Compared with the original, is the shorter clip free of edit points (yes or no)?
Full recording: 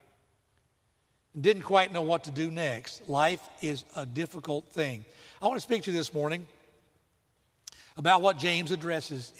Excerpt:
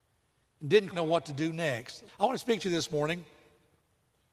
no